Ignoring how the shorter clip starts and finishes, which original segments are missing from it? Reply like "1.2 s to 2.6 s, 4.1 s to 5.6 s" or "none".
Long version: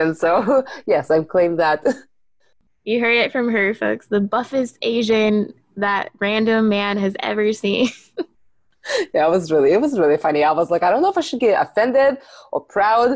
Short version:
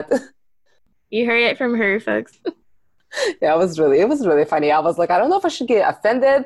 4.1 s to 8.1 s

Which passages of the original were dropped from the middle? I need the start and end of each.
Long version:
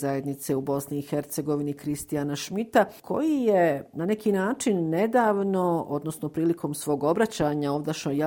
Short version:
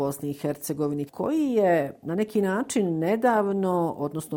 1.7 s to 3.0 s

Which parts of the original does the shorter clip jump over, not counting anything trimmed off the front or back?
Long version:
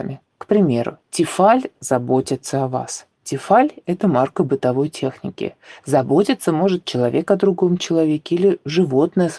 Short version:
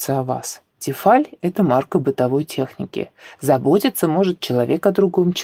none

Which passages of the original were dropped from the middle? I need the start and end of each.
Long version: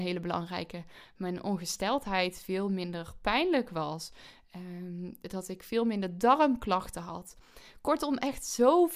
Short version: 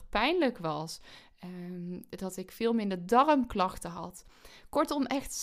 none

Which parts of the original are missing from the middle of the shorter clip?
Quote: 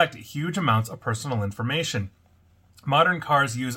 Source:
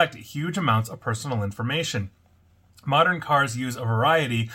none

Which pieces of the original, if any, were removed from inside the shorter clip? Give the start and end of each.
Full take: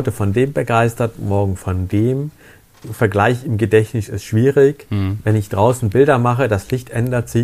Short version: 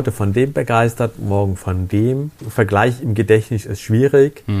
2.4 s to 2.8 s

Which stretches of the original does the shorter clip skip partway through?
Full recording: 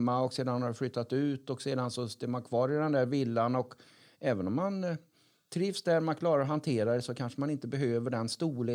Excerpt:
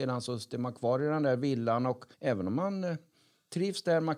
3.8 s to 4.1 s

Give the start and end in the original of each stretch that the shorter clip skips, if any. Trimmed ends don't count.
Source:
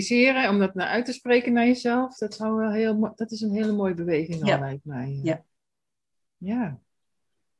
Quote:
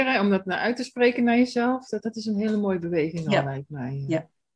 2.3 s to 3.2 s

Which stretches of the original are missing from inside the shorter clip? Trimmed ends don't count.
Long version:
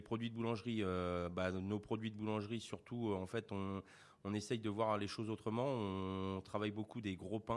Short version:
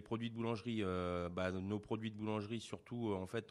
none

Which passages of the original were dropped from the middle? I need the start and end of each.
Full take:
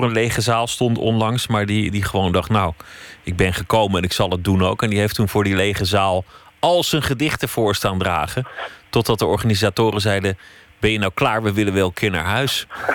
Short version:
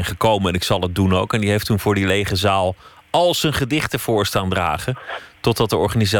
none

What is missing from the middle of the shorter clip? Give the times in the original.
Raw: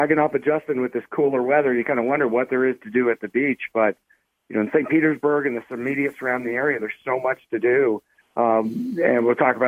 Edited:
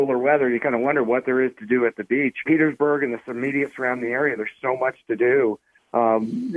3.7 s to 4.9 s

